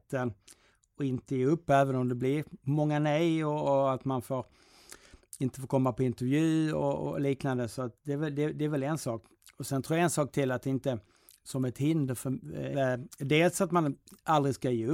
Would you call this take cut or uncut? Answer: cut